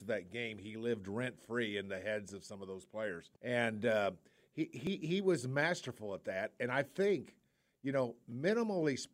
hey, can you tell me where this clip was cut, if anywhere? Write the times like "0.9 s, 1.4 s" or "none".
3.4 s